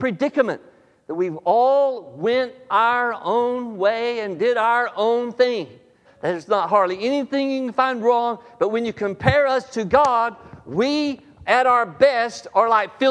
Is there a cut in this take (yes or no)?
yes